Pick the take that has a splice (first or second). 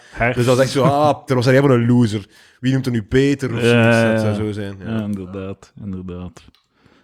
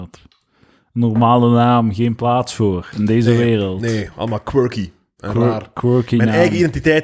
first